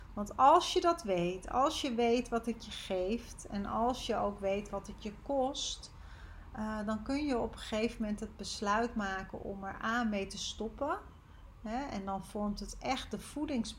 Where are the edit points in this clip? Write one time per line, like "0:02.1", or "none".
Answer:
none